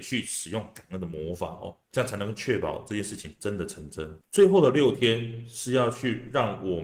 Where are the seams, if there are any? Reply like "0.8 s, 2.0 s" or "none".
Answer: none